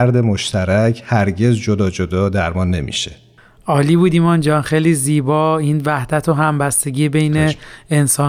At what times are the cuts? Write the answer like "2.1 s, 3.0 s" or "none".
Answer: none